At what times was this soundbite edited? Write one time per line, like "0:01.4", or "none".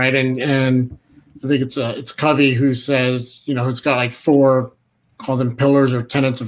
none